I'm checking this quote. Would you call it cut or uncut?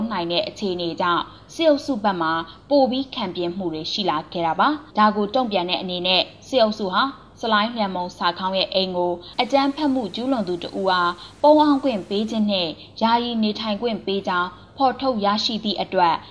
cut